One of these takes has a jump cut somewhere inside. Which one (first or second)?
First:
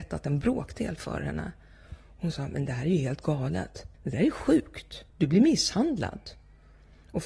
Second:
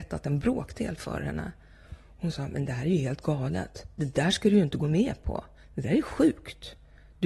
first